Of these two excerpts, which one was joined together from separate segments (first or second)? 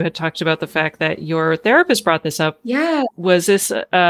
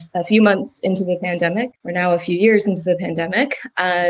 second